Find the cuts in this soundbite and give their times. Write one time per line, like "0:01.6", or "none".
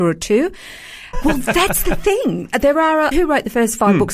0:01.1
0:03.1